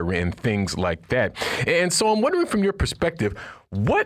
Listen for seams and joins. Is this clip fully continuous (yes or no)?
yes